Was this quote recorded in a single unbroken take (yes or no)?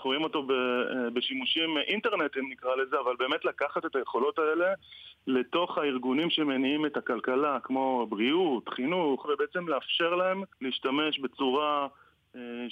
no